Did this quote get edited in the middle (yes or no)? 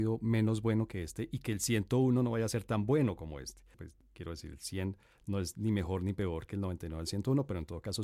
yes